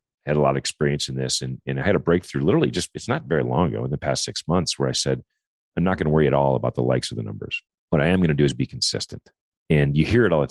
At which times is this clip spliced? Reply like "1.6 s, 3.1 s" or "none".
none